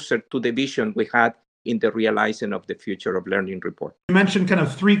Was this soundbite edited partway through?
yes; 1 cut; at 4.0 s

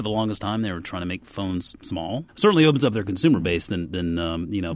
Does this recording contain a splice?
yes; 1 cut; at 2.3 s

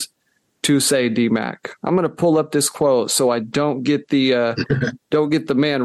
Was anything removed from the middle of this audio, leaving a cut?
no; 0 cuts

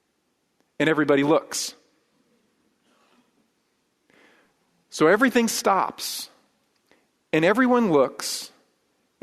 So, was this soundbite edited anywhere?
no; 0 cuts

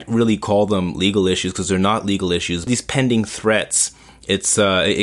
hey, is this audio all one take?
no; 1 cut; at 2.7 s

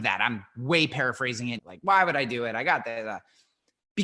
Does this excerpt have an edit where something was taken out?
yes; 1 cut; at 1.6 s

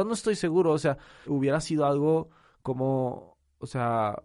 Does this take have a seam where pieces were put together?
yes; 1 cut; at 1.2 s

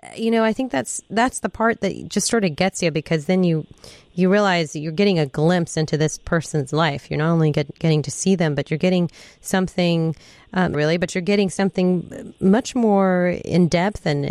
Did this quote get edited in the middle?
yes; 1 cut; at 10.7 s

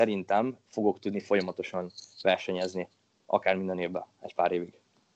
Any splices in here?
no; 0 cuts

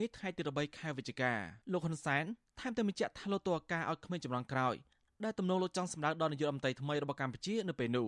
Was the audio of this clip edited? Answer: yes; 1 cut; at 1.6 s

